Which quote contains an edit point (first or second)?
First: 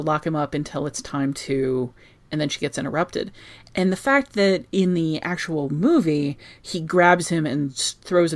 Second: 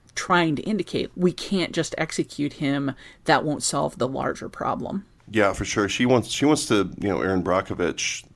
second